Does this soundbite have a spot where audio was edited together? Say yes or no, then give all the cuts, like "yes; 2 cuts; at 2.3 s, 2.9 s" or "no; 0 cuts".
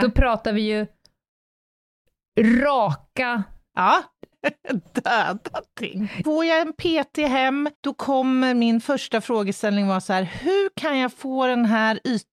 yes; 3 cuts; at 4.3 s, 6.2 s, 7.7 s